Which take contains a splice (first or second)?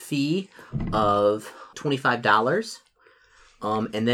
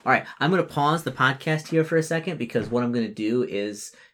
first